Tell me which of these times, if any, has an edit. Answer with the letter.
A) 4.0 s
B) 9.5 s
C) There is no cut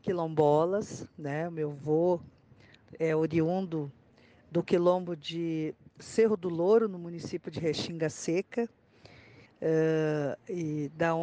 B